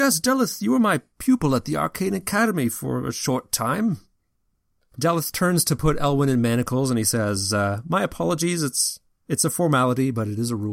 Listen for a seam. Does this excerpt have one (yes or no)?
yes